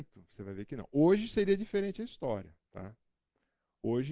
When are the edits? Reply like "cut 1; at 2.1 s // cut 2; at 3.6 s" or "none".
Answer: none